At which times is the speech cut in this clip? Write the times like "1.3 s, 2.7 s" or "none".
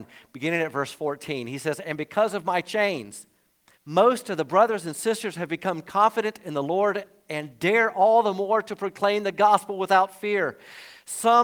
3.7 s